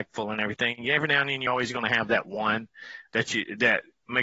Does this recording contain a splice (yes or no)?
no